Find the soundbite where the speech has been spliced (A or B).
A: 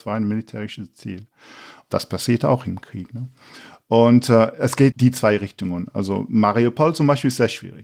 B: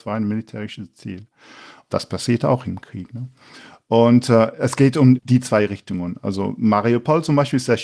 A